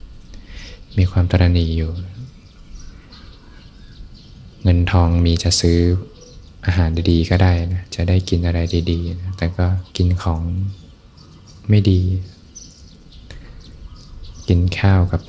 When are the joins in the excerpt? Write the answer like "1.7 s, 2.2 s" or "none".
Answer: 9.9 s